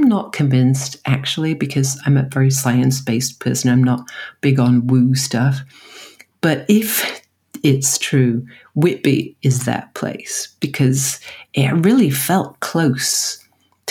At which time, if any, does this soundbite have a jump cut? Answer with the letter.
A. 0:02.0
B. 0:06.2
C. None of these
A